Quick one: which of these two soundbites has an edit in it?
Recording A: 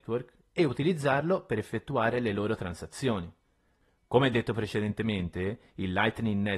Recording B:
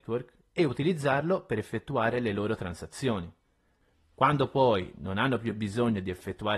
B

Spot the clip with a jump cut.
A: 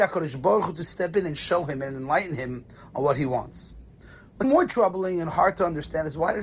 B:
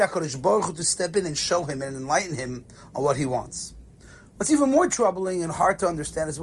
A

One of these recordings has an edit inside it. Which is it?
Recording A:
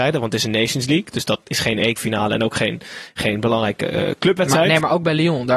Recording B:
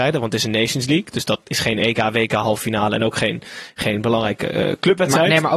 A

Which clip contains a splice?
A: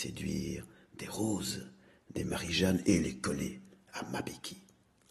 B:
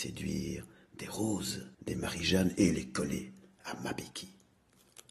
B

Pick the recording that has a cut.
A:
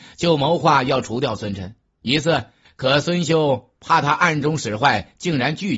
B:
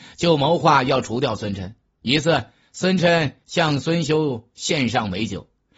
A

